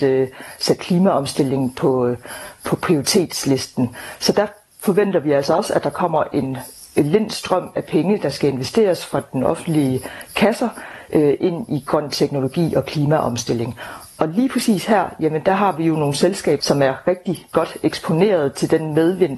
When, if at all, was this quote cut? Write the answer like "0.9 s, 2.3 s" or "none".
16.6 s